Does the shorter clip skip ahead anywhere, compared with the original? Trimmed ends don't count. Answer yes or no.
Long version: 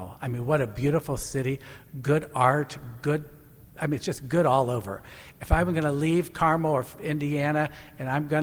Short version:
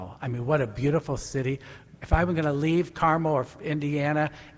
yes